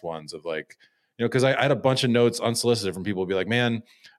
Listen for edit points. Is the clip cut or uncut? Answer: uncut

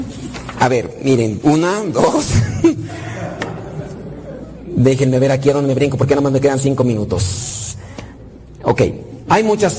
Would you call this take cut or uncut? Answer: cut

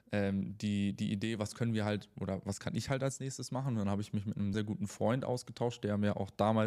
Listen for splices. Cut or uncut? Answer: cut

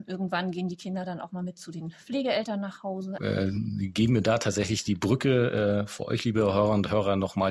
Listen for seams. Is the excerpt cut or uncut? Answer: cut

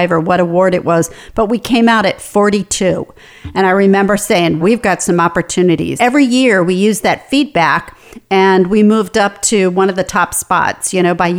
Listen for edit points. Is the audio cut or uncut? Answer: cut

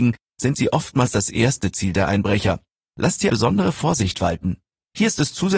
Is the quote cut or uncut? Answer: cut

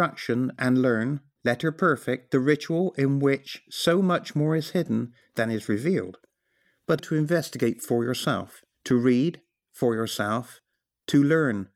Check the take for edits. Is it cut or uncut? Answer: cut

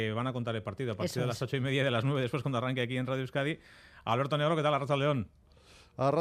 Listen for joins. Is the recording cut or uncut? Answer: uncut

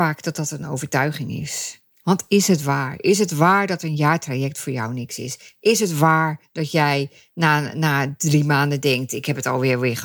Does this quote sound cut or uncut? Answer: cut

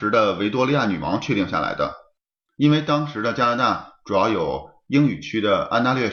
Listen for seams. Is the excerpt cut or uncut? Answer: uncut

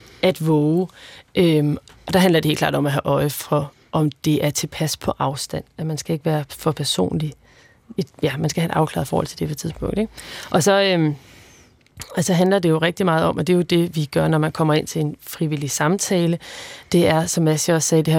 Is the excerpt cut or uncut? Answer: uncut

